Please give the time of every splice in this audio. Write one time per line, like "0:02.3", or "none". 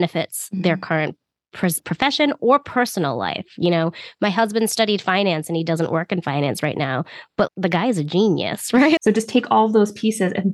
0:07.5
0:09.0